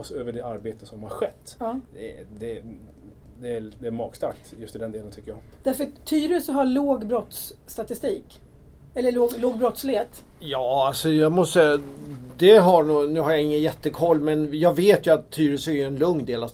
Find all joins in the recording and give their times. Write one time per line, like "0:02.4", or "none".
none